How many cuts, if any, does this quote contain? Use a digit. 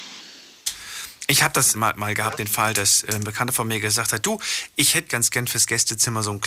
2